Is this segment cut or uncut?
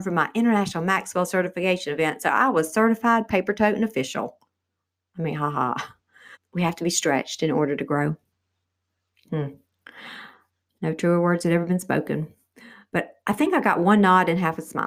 cut